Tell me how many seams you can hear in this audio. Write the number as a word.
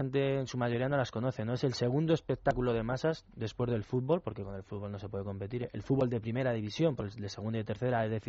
zero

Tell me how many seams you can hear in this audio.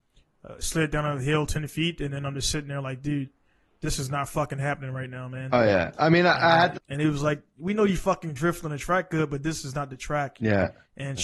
one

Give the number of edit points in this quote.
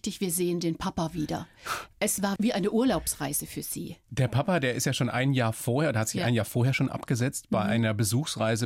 one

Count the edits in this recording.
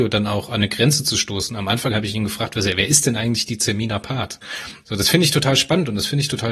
one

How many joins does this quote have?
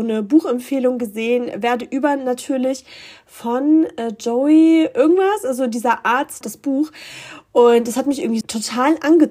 two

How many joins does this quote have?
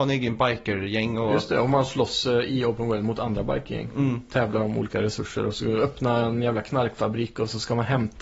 zero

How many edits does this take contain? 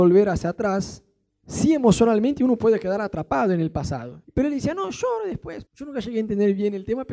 two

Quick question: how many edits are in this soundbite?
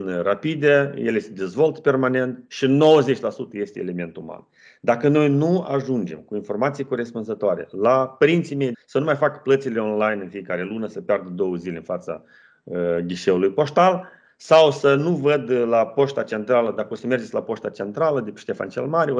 one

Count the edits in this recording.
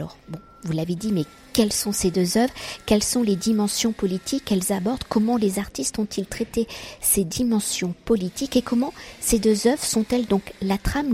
zero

